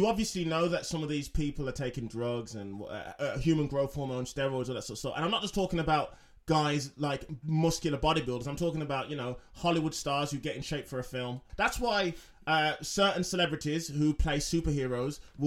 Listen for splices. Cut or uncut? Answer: cut